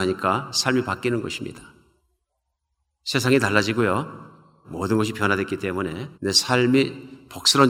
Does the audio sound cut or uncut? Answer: cut